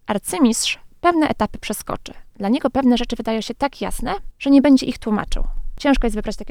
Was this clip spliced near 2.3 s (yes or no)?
no